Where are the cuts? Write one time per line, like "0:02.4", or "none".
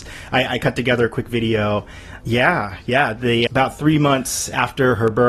0:02.2
0:03.5